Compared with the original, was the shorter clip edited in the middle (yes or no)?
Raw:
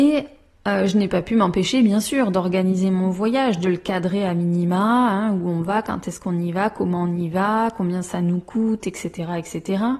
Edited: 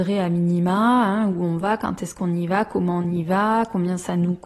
no